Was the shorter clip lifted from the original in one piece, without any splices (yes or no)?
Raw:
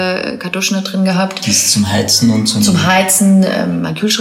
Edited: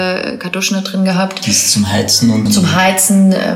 no